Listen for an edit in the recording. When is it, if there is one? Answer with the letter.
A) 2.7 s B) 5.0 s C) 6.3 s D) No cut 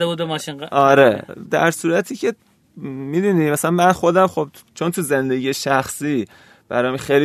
D